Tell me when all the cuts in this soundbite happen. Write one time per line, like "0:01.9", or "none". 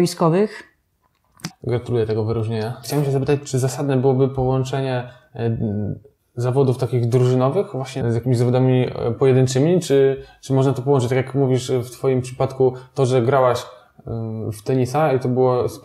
0:01.5
0:02.8
0:08.0